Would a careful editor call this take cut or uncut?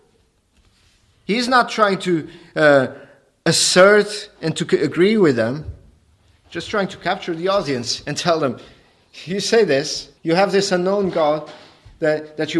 cut